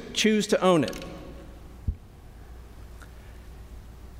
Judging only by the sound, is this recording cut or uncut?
uncut